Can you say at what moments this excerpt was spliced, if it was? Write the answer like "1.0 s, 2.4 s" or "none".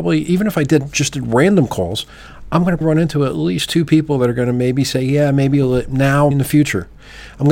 2.8 s, 6.3 s

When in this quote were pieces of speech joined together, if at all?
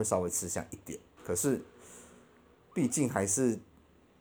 1.2 s

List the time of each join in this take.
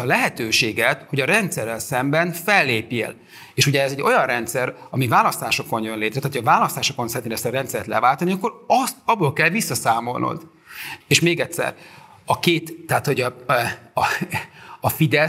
11.0 s

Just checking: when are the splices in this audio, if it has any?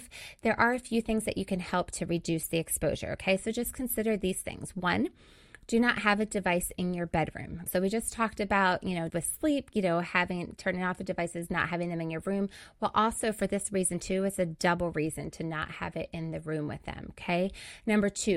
7.7 s, 9.1 s

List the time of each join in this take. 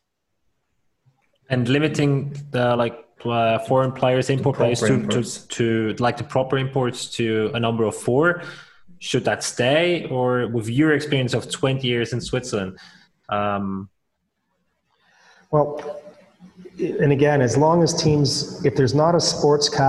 none

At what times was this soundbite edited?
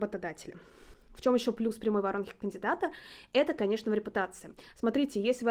none

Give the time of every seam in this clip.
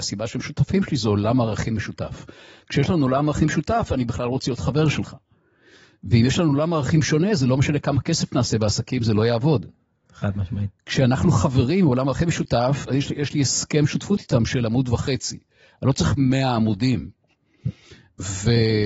none

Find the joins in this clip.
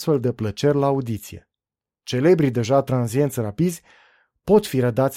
2.0 s

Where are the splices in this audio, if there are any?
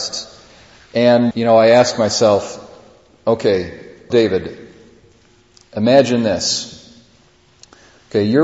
1.3 s, 4.1 s

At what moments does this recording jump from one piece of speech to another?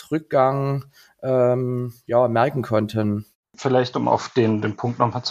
none

